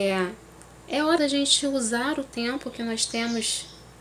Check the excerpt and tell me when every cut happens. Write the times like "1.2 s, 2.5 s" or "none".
1.2 s